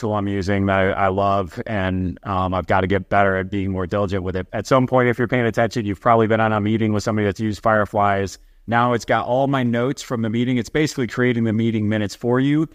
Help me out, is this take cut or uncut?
cut